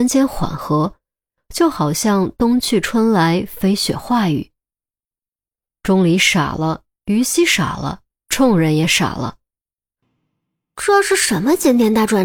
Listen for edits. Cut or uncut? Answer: uncut